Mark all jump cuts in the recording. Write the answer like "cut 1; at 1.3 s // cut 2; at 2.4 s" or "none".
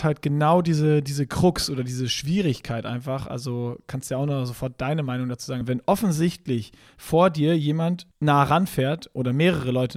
cut 1; at 5.6 s // cut 2; at 8.1 s